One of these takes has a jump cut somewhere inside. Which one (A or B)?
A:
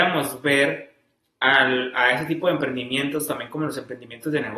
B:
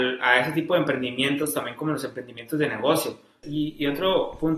B